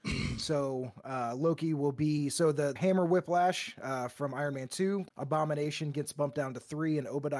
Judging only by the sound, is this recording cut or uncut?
cut